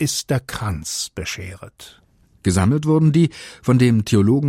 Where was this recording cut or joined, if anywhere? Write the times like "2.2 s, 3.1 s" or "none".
2.4 s